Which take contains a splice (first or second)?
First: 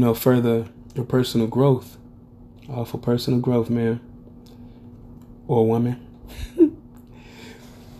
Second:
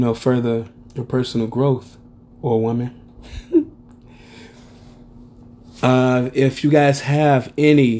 second